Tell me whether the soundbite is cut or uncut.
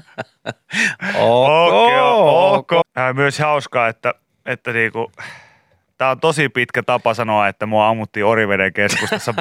cut